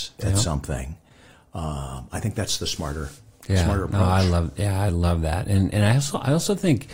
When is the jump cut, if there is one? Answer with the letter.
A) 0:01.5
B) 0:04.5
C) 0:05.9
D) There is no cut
D